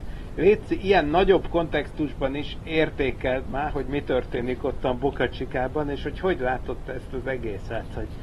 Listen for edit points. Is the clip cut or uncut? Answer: uncut